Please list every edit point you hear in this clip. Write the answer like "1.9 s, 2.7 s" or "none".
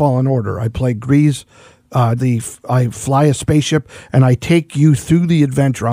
2.2 s

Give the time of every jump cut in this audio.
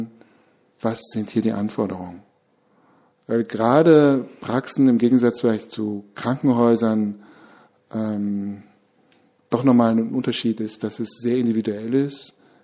none

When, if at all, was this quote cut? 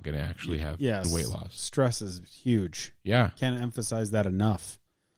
1.0 s

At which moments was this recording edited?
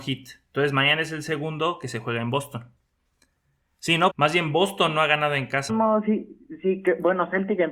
4.1 s, 5.7 s

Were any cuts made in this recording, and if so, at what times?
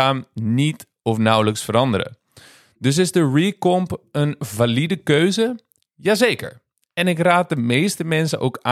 none

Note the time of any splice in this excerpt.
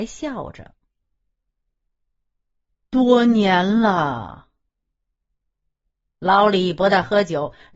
6.1 s

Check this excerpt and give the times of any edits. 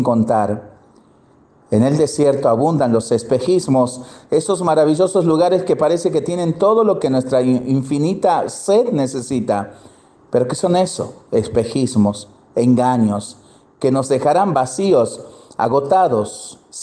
none

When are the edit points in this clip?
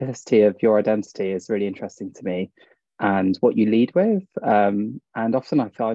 none

